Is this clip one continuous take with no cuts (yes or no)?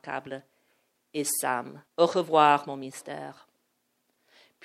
no